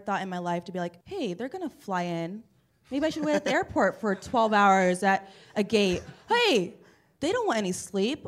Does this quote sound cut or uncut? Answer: cut